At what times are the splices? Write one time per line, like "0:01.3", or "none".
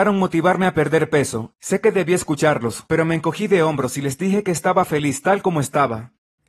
0:01.5
0:02.9